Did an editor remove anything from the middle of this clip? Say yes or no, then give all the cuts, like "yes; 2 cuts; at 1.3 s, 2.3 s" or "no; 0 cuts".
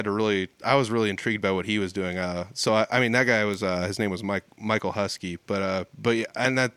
no; 0 cuts